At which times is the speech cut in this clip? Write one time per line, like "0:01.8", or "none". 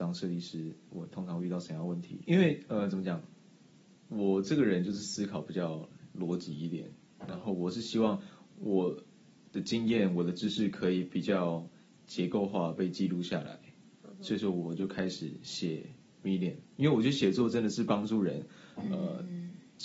0:02.2